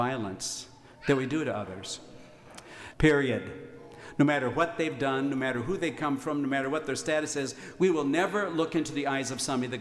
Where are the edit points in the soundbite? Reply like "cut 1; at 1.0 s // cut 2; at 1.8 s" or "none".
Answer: cut 1; at 2.9 s